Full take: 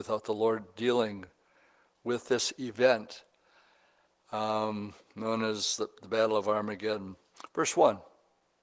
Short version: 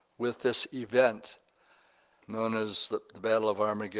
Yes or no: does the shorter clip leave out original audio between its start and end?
yes